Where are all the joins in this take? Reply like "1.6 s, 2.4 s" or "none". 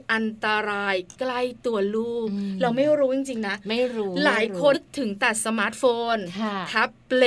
4.7 s